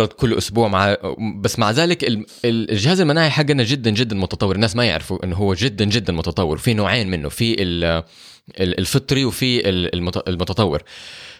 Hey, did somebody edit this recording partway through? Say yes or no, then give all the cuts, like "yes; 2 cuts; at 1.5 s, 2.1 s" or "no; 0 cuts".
yes; 1 cut; at 2.3 s